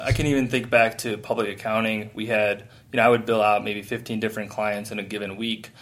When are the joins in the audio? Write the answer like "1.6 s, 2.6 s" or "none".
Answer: none